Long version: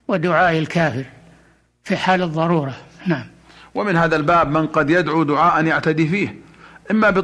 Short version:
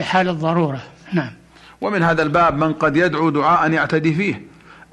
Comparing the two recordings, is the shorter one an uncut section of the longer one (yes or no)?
yes